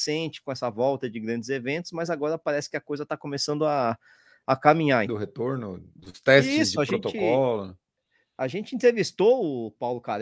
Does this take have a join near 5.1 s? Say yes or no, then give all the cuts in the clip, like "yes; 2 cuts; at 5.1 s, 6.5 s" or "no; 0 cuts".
yes; 1 cut; at 5.1 s